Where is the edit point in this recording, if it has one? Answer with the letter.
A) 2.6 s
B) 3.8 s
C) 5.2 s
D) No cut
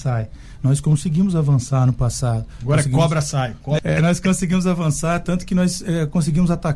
B